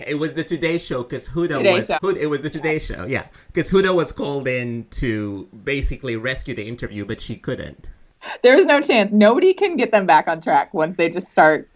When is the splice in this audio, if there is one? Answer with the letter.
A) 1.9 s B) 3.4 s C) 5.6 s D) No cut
A